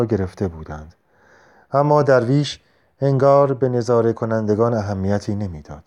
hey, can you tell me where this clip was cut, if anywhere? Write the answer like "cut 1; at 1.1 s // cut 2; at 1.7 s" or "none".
none

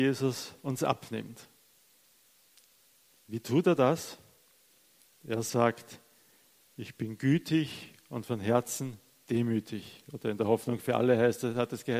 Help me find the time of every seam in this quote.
none

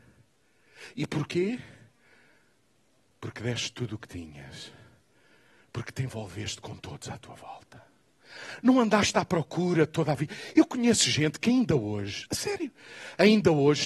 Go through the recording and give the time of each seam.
cut 1; at 12.3 s

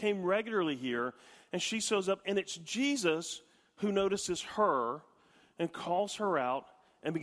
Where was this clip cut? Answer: none

